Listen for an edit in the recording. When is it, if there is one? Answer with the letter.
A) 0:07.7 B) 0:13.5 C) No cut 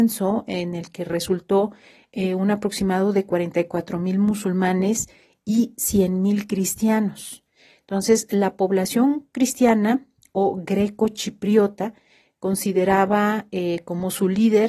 C